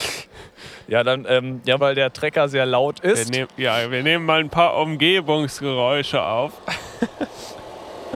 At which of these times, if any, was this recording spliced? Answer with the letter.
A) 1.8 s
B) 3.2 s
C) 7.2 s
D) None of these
A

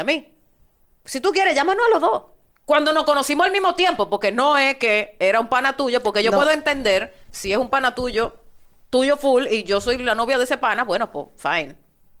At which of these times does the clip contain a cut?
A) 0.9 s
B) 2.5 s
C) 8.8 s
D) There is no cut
B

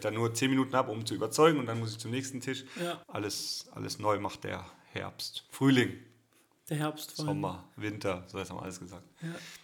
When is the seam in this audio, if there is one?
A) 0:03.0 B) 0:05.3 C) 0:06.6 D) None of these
A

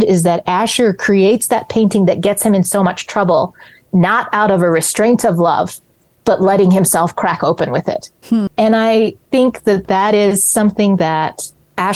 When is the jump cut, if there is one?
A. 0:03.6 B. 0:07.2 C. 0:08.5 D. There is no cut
C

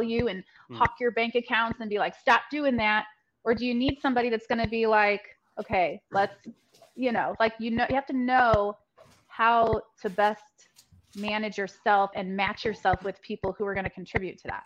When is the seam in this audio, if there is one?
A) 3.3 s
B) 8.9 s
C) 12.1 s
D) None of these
C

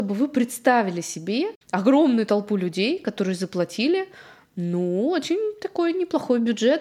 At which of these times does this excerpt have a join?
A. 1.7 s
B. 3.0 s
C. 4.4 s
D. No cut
D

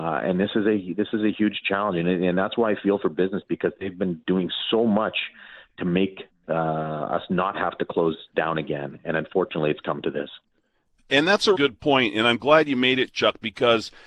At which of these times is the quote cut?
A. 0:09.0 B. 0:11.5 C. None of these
B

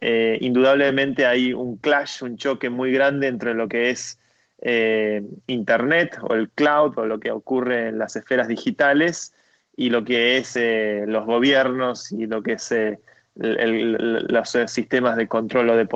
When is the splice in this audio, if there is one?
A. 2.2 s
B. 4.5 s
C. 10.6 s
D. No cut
D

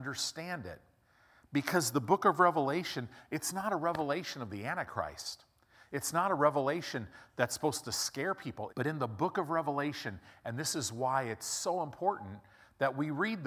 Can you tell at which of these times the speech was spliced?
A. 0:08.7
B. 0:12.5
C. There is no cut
A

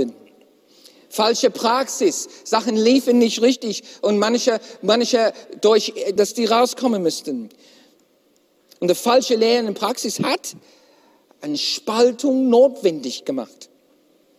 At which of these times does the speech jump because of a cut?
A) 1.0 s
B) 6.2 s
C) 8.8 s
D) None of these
B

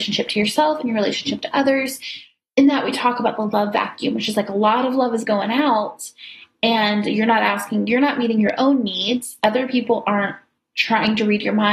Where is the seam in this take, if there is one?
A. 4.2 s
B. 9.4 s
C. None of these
C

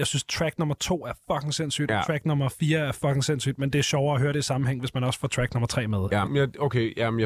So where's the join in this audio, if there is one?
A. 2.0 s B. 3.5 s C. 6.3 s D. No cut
C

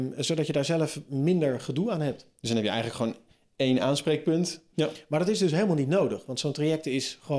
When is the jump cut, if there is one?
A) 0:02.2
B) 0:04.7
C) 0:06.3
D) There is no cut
B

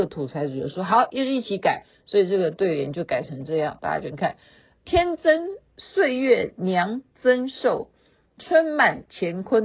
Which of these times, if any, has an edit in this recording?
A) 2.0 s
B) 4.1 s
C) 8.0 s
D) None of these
B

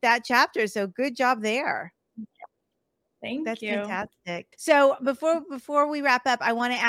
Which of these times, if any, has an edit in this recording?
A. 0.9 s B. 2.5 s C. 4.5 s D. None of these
C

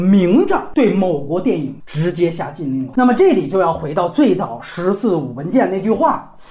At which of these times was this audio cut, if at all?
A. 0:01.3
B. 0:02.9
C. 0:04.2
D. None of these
B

